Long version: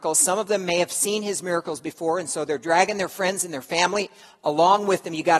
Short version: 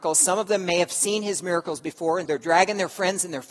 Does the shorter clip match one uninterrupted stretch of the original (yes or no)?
no